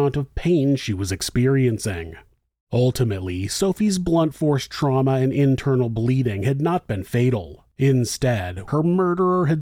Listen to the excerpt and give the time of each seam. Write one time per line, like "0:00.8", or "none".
0:08.7